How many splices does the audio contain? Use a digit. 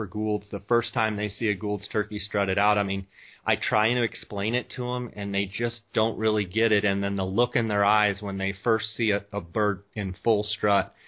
0